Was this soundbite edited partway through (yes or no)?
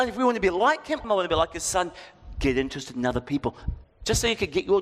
yes